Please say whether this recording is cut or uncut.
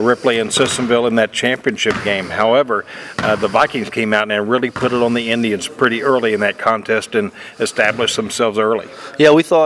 uncut